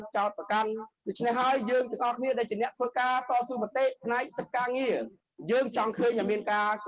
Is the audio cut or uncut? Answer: uncut